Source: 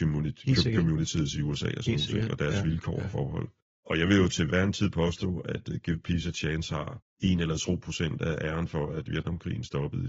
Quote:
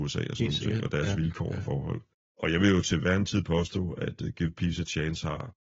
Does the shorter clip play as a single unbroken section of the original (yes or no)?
yes